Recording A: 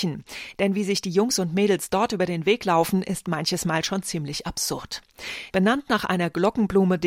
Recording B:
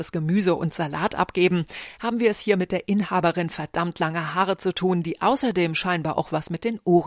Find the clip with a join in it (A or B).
A